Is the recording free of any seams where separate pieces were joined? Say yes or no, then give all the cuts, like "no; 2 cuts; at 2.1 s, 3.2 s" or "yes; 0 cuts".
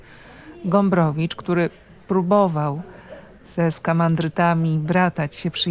yes; 0 cuts